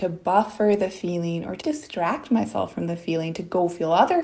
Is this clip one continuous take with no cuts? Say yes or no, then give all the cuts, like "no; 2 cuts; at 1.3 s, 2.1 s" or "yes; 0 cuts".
no; 1 cut; at 1.6 s